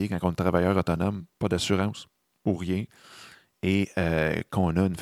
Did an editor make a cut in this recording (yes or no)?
no